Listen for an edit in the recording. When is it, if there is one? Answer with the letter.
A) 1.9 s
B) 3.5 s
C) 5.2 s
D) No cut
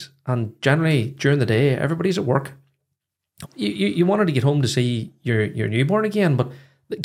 B